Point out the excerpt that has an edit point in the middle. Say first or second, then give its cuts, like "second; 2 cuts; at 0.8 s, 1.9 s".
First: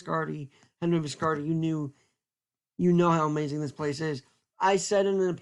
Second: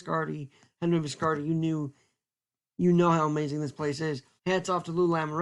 second; 1 cut; at 4.4 s